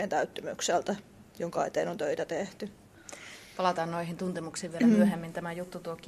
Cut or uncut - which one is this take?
uncut